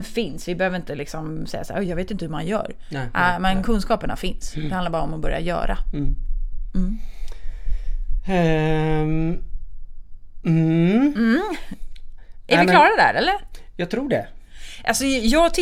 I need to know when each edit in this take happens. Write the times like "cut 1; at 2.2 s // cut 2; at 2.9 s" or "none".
none